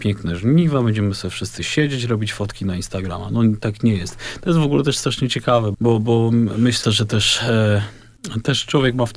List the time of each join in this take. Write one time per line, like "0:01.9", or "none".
0:05.7
0:06.8